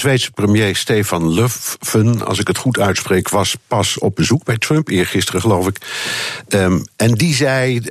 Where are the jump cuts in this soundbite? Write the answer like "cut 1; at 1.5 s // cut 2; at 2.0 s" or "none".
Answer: none

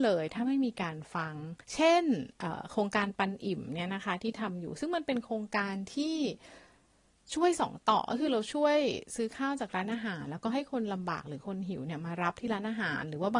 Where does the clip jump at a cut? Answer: cut 1; at 1.6 s

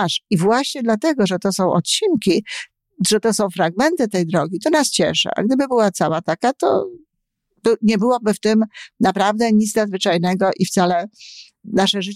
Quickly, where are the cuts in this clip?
none

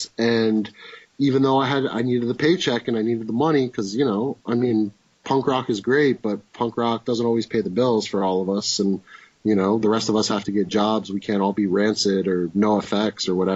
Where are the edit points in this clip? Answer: none

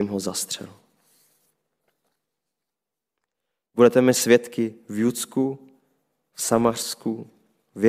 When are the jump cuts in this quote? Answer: none

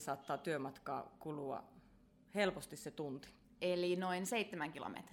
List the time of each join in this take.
cut 1; at 3.4 s

